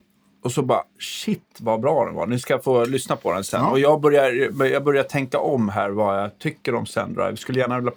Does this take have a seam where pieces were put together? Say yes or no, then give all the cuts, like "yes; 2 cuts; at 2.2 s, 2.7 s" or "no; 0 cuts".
no; 0 cuts